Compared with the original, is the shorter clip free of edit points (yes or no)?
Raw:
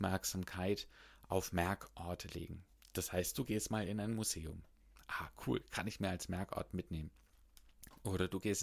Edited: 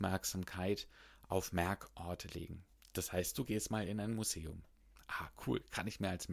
yes